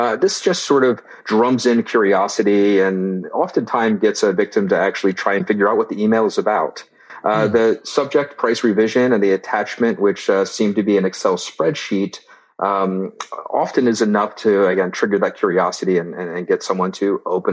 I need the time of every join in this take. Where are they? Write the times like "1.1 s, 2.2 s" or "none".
none